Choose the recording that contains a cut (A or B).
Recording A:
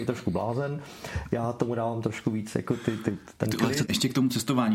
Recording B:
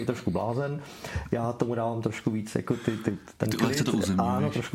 A